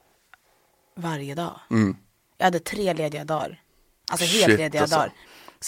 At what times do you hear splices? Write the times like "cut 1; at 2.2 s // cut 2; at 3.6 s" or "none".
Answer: none